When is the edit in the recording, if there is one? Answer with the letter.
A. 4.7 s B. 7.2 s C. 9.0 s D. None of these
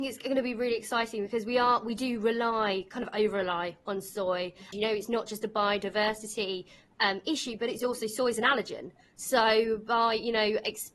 A